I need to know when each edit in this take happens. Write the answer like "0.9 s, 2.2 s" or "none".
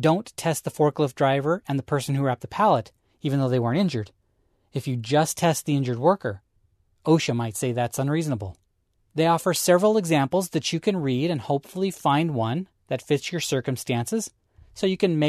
9.0 s